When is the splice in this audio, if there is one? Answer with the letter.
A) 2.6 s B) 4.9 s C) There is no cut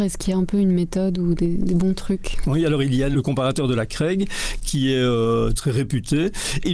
C